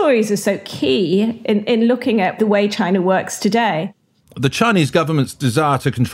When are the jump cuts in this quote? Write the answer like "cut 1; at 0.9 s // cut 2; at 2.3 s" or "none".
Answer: cut 1; at 4.2 s